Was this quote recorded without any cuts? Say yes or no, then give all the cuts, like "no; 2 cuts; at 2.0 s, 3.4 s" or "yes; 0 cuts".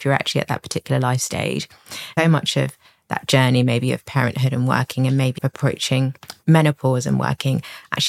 no; 2 cuts; at 2.2 s, 5.4 s